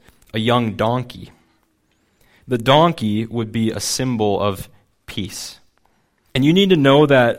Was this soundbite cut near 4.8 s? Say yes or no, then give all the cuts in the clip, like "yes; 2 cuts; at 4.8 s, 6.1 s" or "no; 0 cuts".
no; 1 cut; at 6.3 s